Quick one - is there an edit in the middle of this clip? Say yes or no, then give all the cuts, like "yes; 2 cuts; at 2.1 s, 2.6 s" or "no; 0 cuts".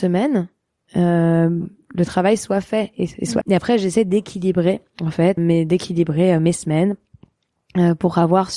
yes; 2 cuts; at 3.4 s, 5.4 s